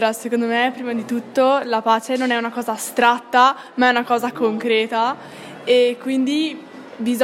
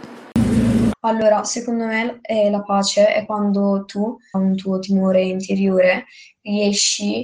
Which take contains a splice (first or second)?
second